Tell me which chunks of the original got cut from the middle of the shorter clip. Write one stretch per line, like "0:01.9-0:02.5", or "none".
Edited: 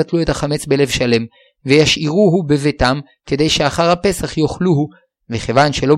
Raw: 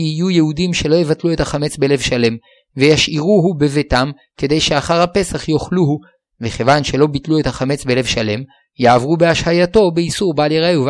none